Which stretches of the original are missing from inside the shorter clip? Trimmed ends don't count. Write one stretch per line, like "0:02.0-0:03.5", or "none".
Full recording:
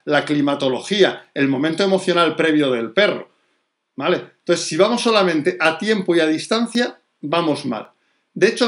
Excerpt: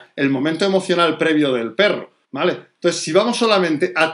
0:03.4-0:03.9